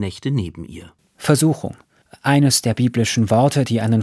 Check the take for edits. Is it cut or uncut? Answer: uncut